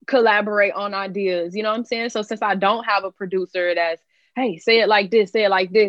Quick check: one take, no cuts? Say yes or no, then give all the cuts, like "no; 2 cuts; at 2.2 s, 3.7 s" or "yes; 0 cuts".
yes; 0 cuts